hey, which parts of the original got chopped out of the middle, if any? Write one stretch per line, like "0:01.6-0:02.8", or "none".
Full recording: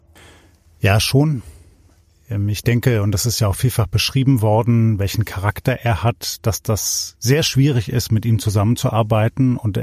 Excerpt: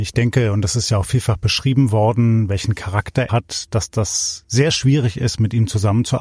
0:05.8-0:06.0